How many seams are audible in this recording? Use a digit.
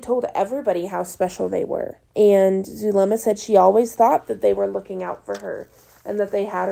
1